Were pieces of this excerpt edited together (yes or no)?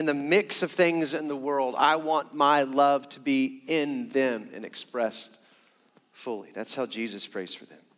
no